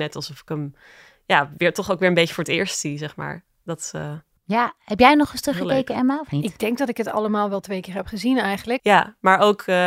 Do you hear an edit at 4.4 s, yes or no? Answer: no